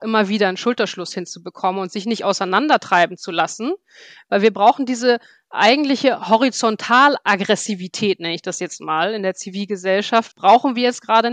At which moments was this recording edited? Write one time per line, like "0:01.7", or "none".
0:10.3